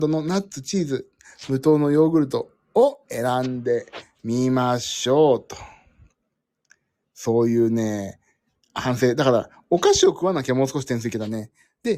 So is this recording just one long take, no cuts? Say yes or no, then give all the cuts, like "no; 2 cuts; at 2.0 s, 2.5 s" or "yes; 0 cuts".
yes; 0 cuts